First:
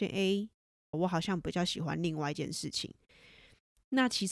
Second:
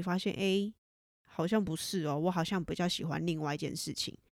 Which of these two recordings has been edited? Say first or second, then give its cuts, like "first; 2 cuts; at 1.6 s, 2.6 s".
first; 1 cut; at 0.9 s